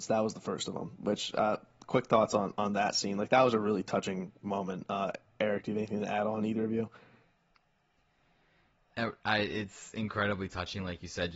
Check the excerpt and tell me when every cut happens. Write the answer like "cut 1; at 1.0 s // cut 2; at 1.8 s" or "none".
none